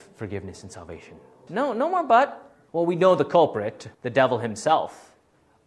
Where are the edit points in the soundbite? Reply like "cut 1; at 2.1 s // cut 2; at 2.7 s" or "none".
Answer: cut 1; at 1.5 s // cut 2; at 2.7 s // cut 3; at 3.9 s